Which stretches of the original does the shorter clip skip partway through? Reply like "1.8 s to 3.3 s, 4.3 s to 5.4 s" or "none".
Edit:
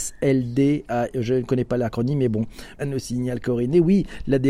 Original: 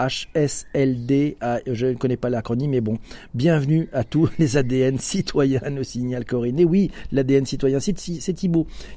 3.3 s to 5.6 s